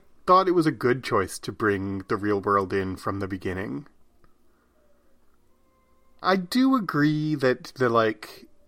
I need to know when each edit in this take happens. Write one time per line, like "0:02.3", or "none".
none